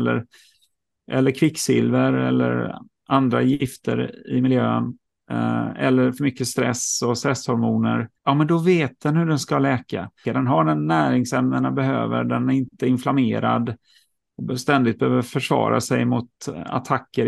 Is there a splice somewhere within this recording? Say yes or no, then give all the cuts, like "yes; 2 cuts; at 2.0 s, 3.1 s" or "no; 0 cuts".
yes; 2 cuts; at 8.2 s, 10.2 s